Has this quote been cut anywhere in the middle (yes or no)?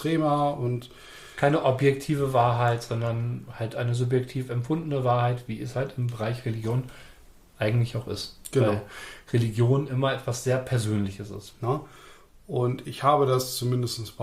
no